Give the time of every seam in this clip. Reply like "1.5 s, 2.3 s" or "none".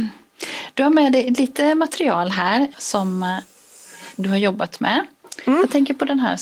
2.7 s